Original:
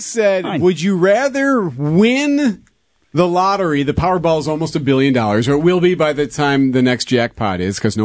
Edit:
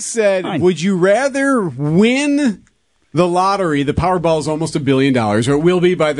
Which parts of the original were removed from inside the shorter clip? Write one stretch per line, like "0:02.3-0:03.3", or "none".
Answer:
none